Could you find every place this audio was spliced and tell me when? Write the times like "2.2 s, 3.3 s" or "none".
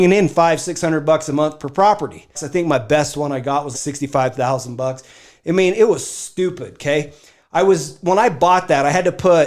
2.3 s, 3.7 s